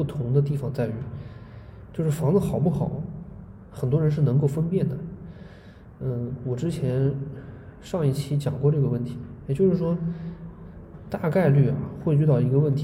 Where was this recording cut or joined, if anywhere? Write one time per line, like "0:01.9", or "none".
none